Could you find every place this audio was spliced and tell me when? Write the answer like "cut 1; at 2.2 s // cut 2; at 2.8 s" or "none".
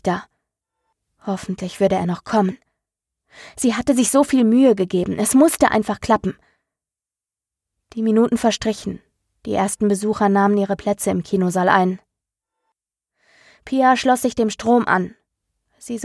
none